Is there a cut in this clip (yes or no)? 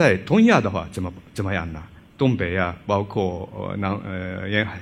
yes